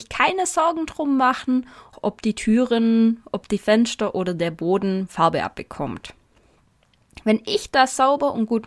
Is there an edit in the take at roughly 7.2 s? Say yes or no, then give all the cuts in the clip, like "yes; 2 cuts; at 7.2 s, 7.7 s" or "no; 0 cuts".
no; 1 cut; at 1.9 s